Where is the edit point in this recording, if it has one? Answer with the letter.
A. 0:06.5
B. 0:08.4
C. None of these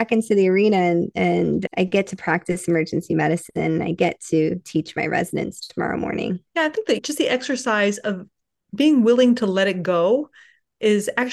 A